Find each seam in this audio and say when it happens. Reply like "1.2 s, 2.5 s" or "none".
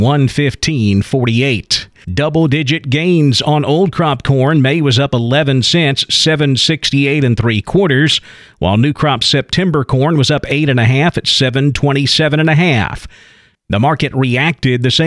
2.0 s, 13.5 s